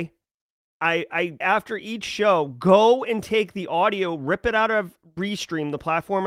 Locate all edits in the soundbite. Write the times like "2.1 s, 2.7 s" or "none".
1.4 s